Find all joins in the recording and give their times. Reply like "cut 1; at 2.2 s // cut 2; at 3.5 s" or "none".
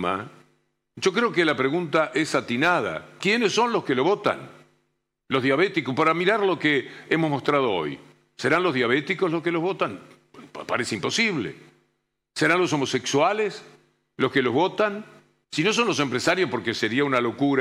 cut 1; at 15.4 s